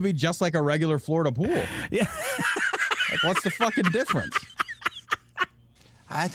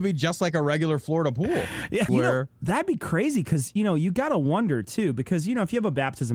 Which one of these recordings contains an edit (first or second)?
second